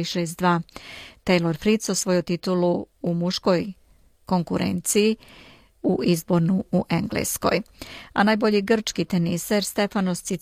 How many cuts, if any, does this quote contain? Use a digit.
0